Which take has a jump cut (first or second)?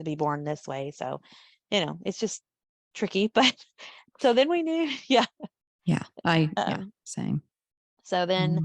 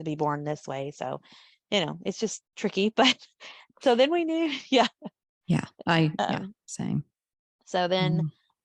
second